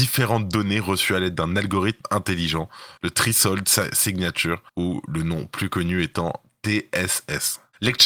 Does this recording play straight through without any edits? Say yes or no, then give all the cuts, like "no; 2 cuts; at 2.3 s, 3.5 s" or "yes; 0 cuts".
no; 2 cuts; at 3.0 s, 4.7 s